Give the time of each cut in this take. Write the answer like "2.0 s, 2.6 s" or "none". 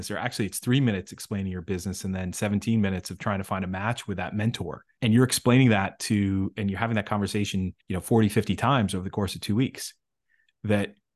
5.0 s, 7.8 s